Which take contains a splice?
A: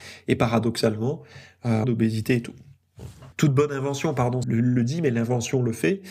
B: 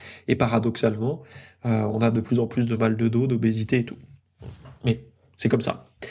A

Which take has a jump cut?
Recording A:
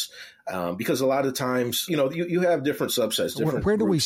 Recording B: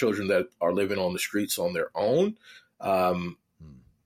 A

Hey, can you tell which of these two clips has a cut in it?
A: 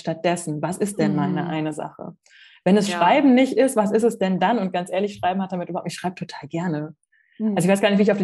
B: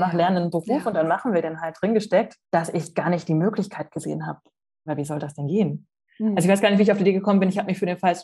B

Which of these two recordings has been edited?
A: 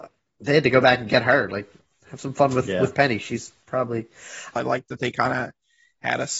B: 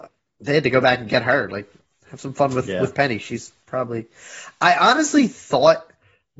A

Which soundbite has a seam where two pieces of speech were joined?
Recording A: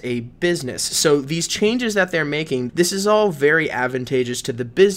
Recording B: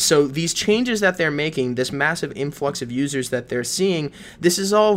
A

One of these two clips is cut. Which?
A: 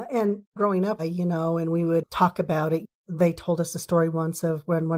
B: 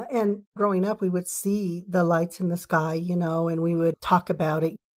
A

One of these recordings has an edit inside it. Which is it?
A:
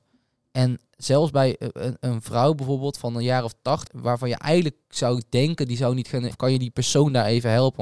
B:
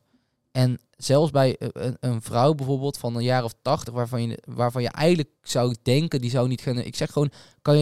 A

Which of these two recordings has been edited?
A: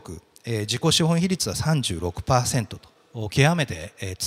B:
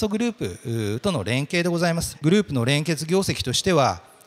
B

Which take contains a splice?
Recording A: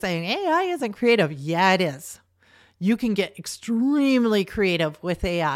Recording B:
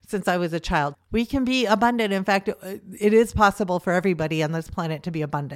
B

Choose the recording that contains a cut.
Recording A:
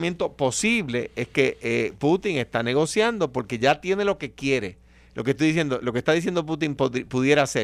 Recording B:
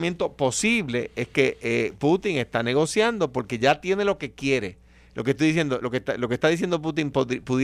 A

